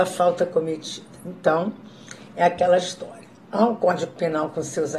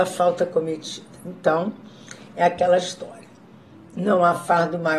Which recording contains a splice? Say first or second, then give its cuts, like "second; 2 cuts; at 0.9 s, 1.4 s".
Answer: first; 1 cut; at 3.5 s